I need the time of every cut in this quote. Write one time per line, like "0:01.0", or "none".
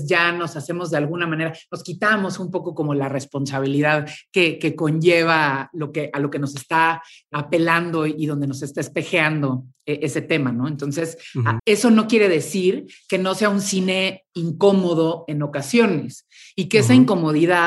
0:11.6